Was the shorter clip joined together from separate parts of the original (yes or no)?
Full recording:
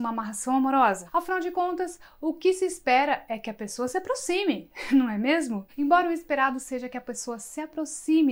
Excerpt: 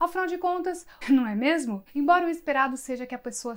yes